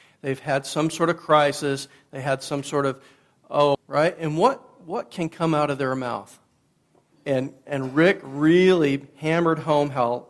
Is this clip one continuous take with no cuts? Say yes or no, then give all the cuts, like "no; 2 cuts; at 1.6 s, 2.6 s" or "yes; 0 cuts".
no; 2 cuts; at 3.7 s, 7.1 s